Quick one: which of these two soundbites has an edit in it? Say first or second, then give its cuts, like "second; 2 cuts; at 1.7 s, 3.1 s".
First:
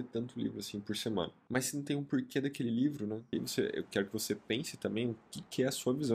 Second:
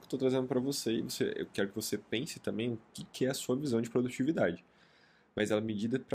first; 2 cuts; at 1.5 s, 3.3 s